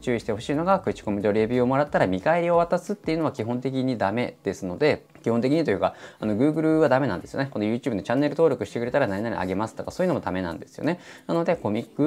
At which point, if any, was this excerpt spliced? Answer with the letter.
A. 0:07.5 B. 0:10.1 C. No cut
C